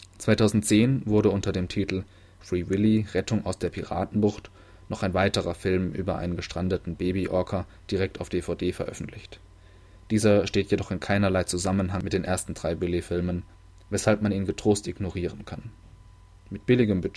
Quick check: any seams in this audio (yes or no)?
no